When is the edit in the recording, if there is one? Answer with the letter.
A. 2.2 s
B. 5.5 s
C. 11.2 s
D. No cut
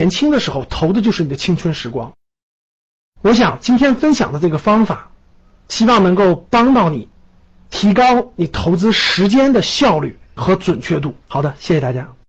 C